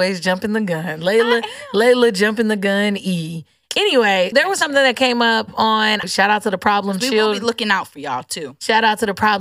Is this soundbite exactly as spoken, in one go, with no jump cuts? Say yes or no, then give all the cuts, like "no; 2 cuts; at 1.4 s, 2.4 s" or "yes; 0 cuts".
no; 2 cuts; at 4.3 s, 6.0 s